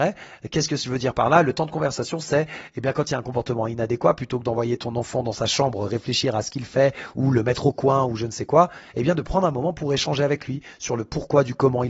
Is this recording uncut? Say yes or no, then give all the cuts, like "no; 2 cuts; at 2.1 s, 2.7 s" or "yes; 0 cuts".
yes; 0 cuts